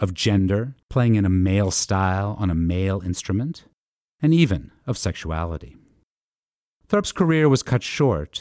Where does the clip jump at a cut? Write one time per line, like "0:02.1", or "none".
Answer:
none

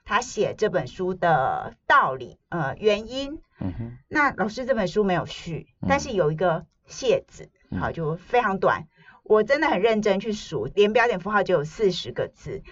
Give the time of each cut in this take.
none

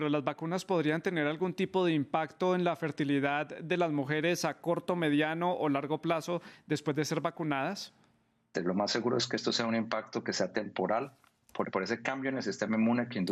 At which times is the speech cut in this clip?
0:08.5
0:11.6

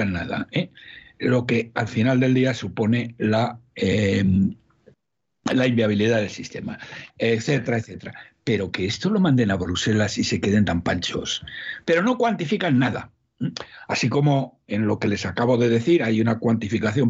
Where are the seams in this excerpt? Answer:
0:07.1
0:11.8

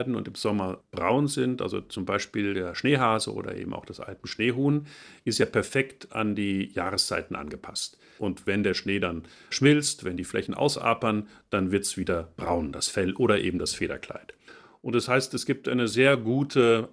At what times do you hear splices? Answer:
0:08.2

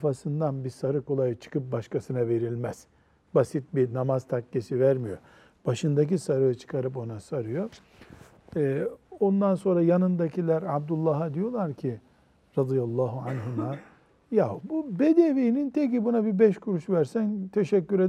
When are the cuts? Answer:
0:01.1

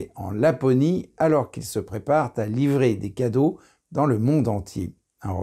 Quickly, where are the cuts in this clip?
none

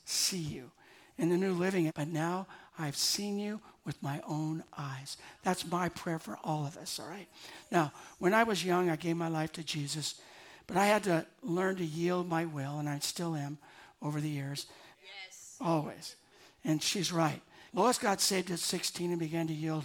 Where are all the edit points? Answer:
0:01.9
0:14.9
0:17.7

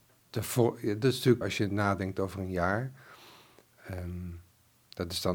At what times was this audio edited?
0:01.4

